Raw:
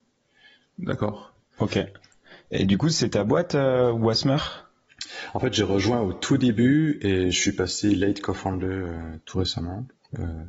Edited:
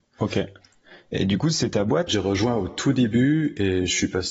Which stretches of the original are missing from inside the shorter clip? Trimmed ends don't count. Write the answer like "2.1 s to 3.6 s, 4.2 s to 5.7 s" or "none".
3.5 s to 5.5 s